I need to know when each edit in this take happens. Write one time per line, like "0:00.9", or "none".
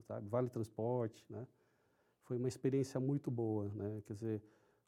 none